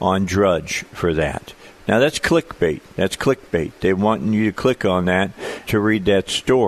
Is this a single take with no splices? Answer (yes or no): no